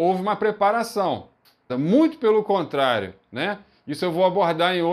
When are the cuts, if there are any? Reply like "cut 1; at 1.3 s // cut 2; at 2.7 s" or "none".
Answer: cut 1; at 1.7 s

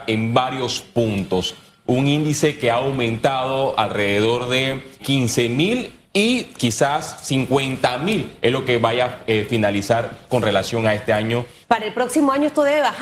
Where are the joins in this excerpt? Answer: cut 1; at 5.0 s // cut 2; at 11.6 s

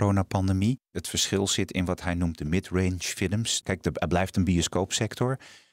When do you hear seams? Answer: cut 1; at 0.9 s // cut 2; at 3.6 s

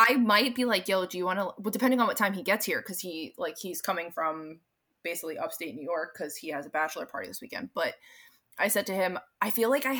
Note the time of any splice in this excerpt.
none

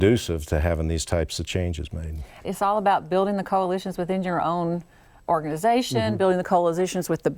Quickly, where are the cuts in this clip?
cut 1; at 2.4 s

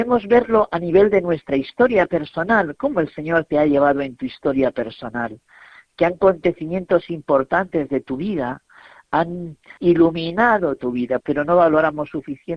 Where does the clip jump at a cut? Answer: cut 1; at 9.8 s // cut 2; at 11.2 s

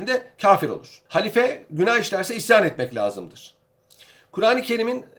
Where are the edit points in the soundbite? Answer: cut 1; at 1.1 s

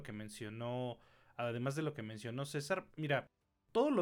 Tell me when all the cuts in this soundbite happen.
cut 1; at 2.9 s

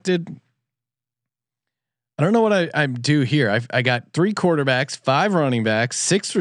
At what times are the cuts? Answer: none

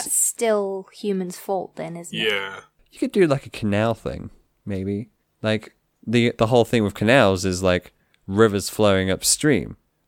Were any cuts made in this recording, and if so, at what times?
none

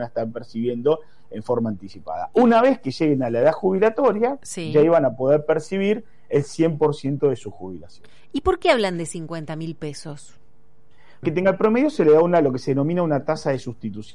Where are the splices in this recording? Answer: cut 1; at 11.2 s

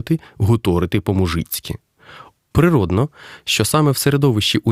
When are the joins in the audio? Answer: cut 1; at 2.4 s

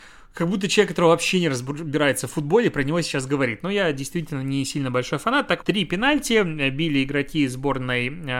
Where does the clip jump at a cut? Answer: cut 1; at 5.6 s

